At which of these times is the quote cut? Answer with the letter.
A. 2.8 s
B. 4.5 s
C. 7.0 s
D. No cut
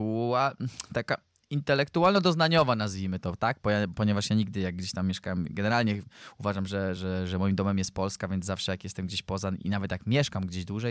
C